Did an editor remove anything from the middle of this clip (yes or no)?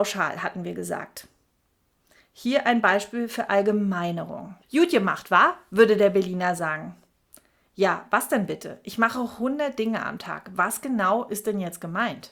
yes